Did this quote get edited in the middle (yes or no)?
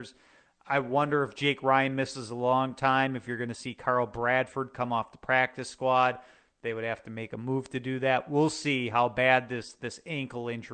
no